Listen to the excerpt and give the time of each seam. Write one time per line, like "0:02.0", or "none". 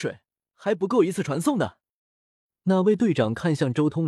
none